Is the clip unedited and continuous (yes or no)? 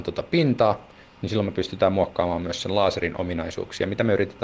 yes